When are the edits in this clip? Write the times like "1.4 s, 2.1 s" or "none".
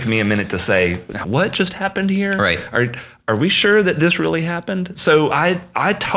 1.2 s